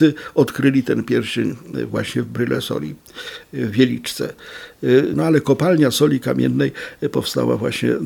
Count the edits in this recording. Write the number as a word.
one